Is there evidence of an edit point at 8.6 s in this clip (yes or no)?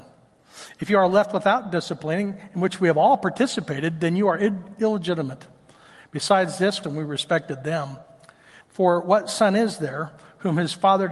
yes